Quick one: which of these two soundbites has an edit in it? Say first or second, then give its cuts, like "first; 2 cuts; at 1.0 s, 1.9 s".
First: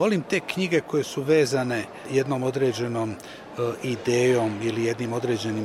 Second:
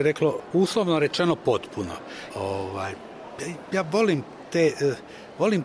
second; 1 cut; at 2.3 s